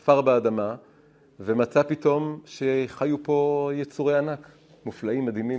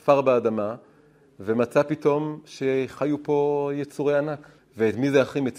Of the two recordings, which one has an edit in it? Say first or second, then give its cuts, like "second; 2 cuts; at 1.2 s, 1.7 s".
second; 1 cut; at 4.6 s